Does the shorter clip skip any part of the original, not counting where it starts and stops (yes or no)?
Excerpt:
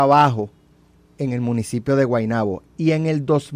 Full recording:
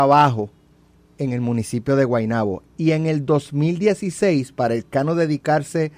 no